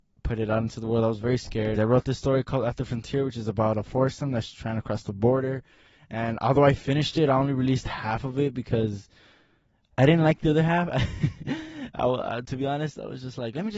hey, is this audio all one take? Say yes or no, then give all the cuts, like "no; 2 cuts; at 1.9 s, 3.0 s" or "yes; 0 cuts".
no; 1 cut; at 1.8 s